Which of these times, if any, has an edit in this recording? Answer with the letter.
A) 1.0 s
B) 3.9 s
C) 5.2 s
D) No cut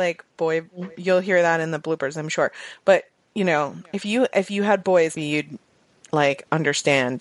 C